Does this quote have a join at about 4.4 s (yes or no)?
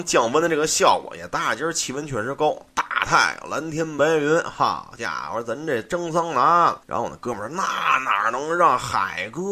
no